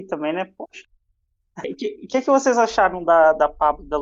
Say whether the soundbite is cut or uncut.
cut